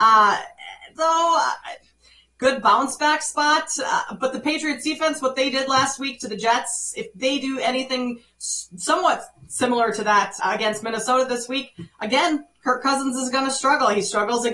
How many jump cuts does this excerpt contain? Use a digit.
2